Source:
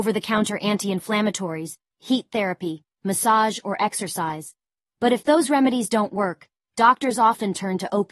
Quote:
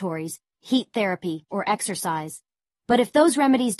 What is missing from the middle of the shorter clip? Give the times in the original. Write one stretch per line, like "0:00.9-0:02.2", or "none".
0:02.9-0:03.6